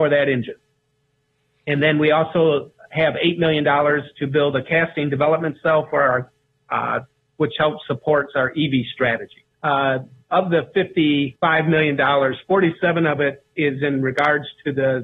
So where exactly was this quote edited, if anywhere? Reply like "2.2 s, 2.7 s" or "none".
7.3 s, 9.5 s, 11.4 s